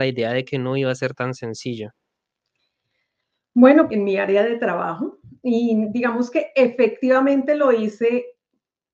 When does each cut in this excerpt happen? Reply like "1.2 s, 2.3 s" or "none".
3.9 s